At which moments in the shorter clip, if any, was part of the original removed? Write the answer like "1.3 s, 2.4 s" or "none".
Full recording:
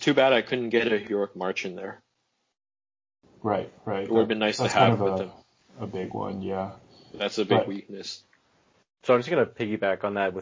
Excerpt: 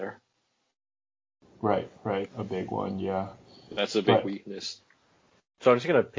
2.2 s